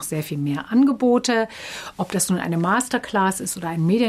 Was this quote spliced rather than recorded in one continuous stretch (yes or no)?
no